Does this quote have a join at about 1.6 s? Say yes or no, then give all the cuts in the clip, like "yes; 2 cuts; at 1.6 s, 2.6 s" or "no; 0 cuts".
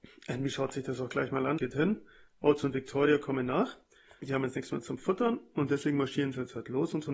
yes; 2 cuts; at 1.6 s, 4.2 s